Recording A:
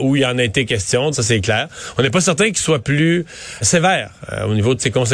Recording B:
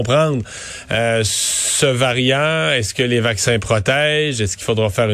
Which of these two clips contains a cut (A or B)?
A